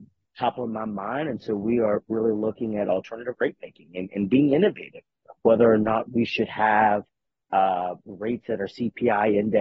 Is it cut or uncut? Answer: uncut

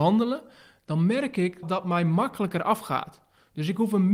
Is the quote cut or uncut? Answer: cut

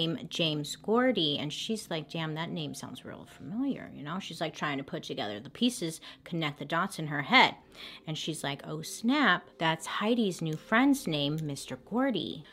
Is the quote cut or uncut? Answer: uncut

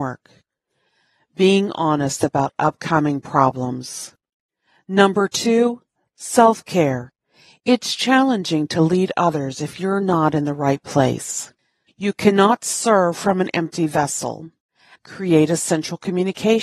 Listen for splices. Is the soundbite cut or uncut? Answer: cut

